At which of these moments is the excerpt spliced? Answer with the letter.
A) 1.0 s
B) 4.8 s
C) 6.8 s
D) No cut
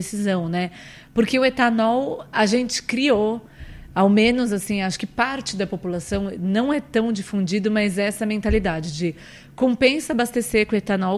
D